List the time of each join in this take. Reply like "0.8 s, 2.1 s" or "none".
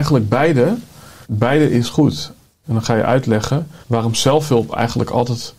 1.2 s, 2.6 s, 3.8 s